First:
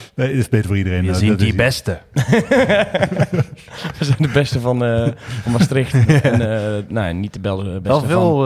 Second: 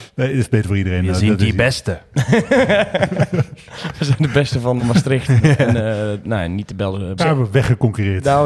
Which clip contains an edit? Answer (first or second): second